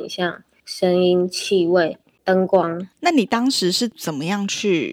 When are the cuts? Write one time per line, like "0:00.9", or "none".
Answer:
0:02.9